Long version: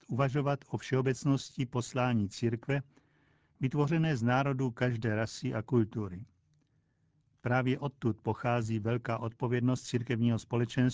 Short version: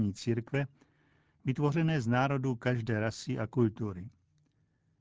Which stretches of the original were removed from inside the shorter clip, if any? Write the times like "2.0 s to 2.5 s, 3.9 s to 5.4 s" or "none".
none